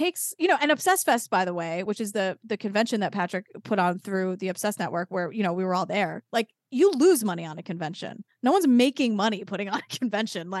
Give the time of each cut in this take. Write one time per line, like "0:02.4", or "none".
none